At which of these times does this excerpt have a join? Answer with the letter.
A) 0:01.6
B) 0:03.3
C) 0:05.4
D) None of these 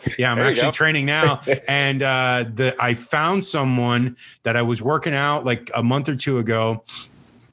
D